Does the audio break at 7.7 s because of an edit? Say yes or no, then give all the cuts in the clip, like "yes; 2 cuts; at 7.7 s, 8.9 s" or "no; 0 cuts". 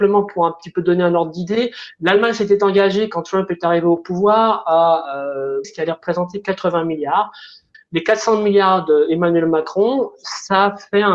yes; 2 cuts; at 5.6 s, 7.7 s